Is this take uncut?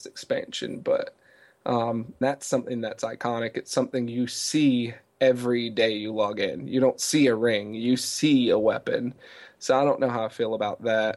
no; 1 cut; at 2.2 s

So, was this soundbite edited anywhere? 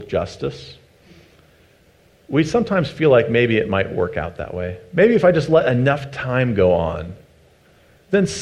no; 0 cuts

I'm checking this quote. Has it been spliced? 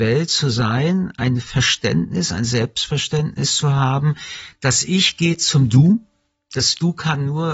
no; 0 cuts

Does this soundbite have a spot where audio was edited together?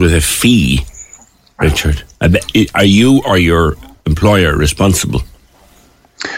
no; 0 cuts

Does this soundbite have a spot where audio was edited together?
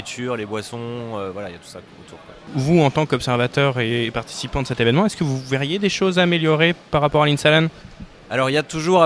no; 0 cuts

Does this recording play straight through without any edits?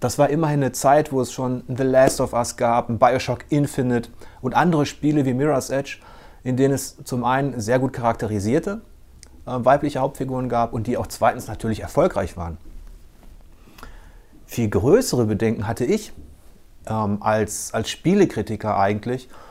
yes; 0 cuts

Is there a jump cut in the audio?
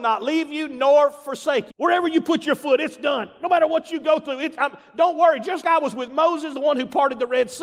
yes; 2 cuts; at 1.7 s, 5.6 s

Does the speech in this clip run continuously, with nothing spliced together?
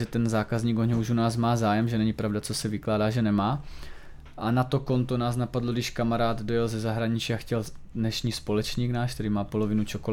yes; 0 cuts

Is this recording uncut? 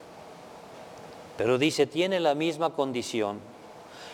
yes; 0 cuts

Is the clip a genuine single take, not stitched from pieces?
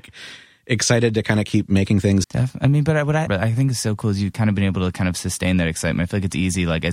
no; 2 cuts; at 2.2 s, 3.3 s

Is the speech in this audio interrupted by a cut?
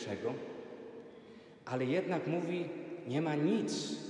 no; 0 cuts

